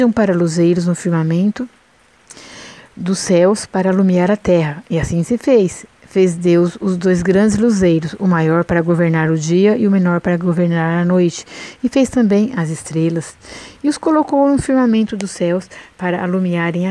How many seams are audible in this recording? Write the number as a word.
zero